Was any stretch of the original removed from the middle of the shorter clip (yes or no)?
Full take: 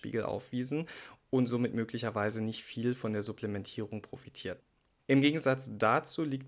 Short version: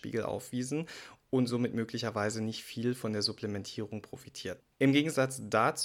yes